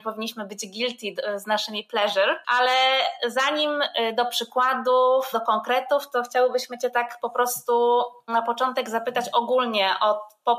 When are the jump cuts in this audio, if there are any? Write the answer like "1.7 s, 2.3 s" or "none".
5.3 s